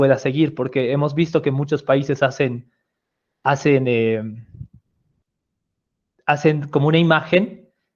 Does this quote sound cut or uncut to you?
uncut